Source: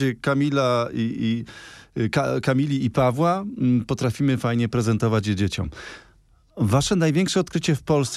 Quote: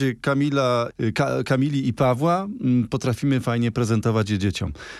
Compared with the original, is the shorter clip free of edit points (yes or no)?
no